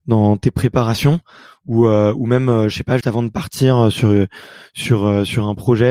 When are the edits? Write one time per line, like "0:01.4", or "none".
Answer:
0:03.0